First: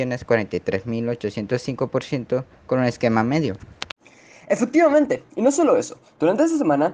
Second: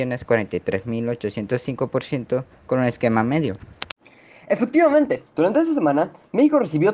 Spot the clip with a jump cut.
second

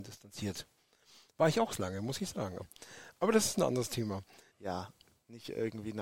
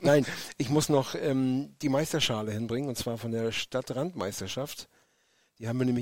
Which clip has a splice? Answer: first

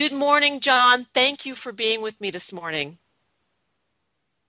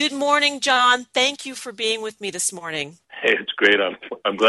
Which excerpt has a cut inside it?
second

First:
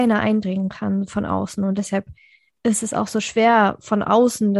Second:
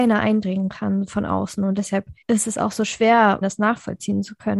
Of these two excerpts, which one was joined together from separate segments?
second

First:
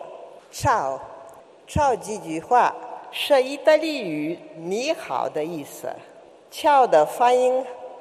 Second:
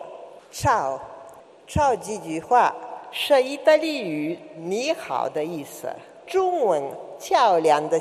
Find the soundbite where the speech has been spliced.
second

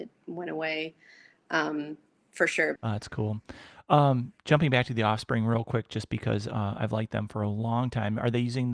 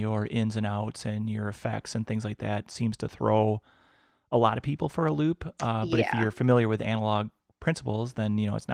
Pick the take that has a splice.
first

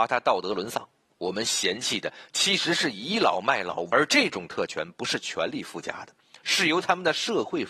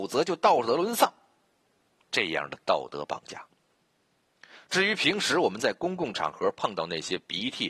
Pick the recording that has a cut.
first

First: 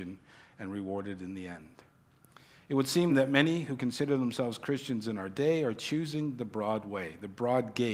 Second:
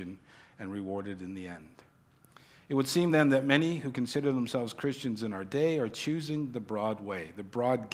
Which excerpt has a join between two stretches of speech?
first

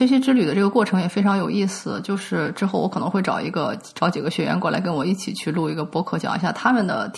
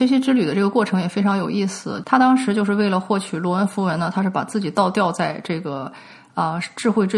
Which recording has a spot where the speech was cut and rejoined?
second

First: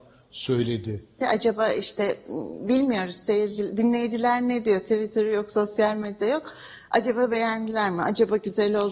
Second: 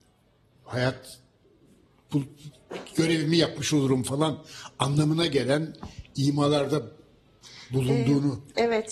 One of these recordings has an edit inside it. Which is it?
first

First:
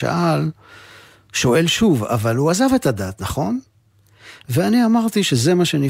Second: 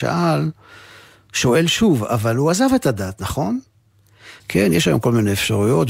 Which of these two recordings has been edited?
second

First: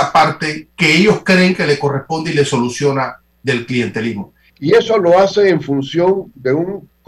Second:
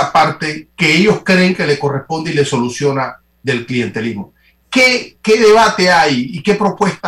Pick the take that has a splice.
first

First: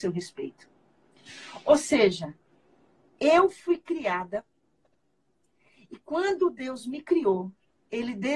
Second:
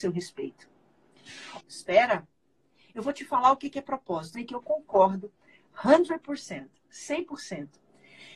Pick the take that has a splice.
second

